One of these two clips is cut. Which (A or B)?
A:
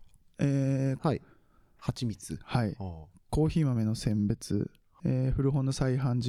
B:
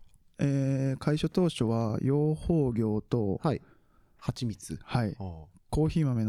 A